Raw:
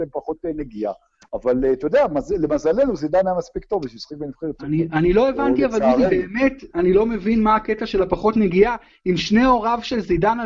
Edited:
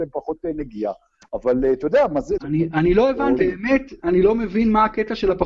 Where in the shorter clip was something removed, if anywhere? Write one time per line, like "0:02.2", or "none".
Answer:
0:02.4
0:03.4